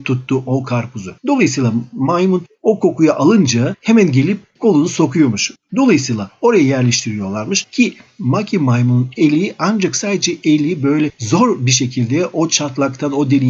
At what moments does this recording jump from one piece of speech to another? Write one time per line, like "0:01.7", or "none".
0:01.2
0:05.7